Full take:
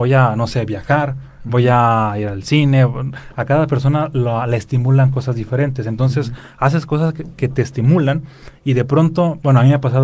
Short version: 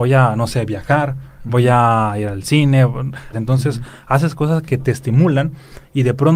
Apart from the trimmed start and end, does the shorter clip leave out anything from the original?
yes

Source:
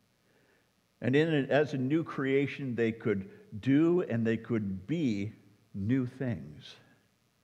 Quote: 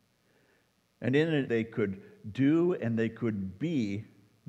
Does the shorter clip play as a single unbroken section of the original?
no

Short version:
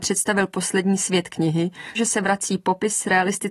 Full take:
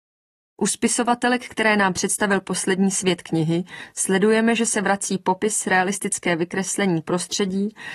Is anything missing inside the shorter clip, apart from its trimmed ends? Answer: yes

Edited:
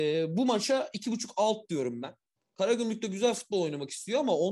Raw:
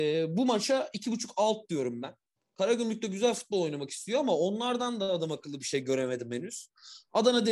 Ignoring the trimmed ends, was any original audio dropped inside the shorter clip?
no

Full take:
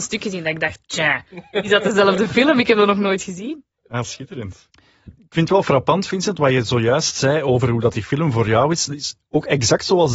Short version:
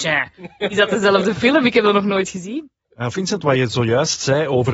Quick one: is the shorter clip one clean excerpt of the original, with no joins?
no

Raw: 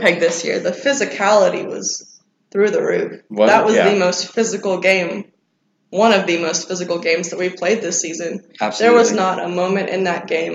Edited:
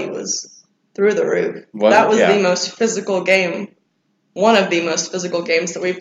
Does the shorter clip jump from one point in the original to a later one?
no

